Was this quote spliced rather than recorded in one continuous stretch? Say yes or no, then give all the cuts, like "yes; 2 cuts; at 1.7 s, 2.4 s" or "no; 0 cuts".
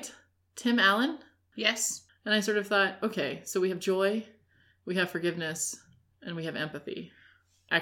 yes; 1 cut; at 2.1 s